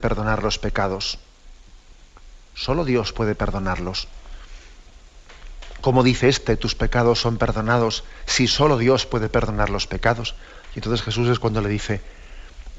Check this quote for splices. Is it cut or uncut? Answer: uncut